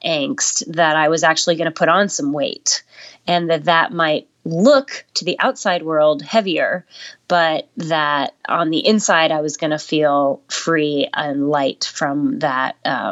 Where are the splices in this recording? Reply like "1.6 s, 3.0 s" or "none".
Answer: 8.4 s